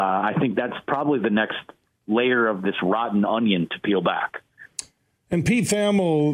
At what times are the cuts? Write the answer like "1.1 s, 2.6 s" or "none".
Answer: none